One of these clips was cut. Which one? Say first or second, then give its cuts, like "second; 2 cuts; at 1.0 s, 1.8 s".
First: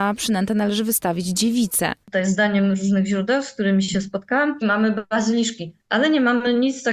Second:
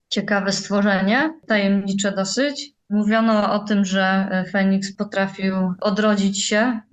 first; 2 cuts; at 2.0 s, 4.6 s